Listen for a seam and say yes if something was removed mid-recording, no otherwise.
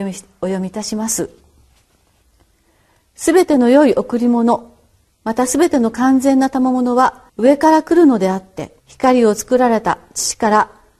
yes